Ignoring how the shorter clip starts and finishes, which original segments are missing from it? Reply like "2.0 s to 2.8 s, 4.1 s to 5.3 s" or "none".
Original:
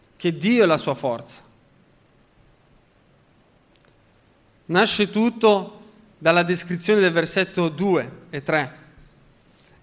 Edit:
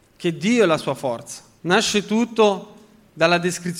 1.6 s to 4.6 s